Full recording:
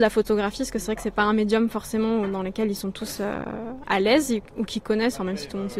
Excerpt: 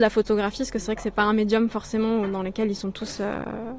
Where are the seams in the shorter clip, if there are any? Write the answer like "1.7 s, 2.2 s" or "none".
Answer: none